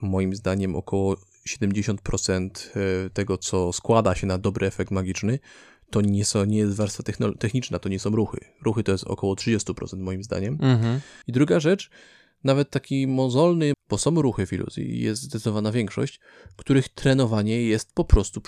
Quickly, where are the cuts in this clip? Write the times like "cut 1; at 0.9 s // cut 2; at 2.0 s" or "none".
cut 1; at 11.2 s // cut 2; at 13.7 s